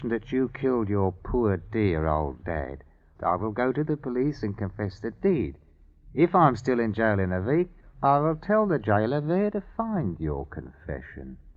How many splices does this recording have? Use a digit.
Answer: 1